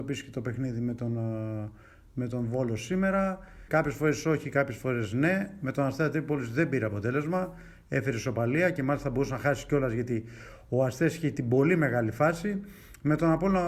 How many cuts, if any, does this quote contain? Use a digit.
1